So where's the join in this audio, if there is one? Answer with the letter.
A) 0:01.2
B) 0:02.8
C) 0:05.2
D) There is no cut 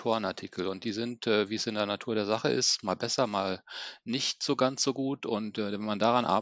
D